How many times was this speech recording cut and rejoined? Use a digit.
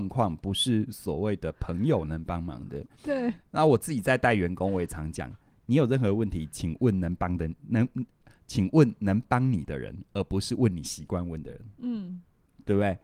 1